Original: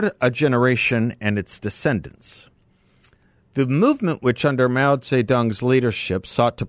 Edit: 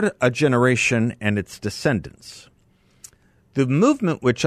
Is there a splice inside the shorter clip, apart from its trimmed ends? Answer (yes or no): no